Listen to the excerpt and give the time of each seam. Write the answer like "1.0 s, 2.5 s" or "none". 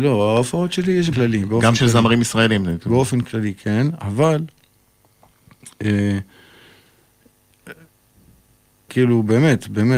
1.1 s, 8.9 s